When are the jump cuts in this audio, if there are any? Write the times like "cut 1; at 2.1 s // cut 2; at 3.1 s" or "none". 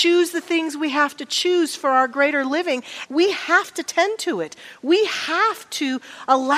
cut 1; at 3.1 s